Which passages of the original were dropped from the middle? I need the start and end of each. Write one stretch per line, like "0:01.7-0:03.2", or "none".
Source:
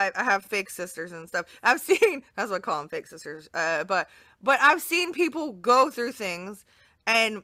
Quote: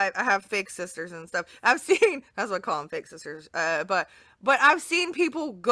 none